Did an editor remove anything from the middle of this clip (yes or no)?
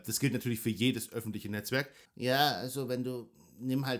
yes